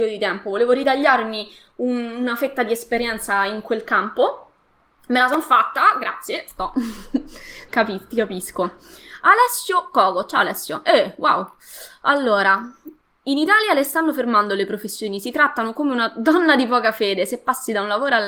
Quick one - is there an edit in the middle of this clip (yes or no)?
yes